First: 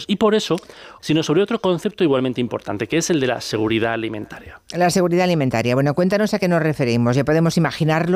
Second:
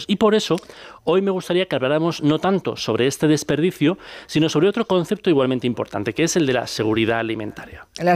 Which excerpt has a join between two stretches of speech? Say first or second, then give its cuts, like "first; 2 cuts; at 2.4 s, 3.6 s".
first; 1 cut; at 1.0 s